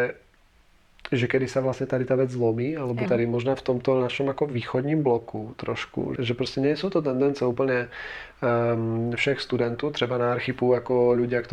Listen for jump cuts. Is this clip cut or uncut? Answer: cut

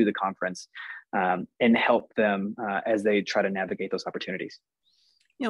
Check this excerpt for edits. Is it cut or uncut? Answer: uncut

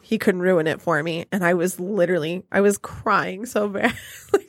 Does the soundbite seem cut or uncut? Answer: uncut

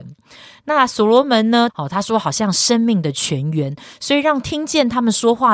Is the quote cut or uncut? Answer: cut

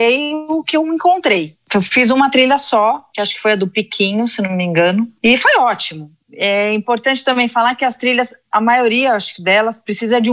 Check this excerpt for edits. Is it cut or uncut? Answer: uncut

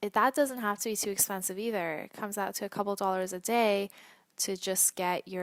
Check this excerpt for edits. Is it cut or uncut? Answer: uncut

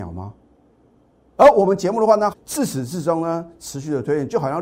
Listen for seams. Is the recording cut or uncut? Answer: cut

